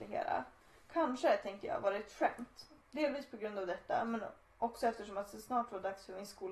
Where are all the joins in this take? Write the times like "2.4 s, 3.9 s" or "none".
2.8 s